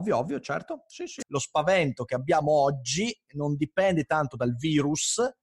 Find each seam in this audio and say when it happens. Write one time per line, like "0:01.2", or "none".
0:01.2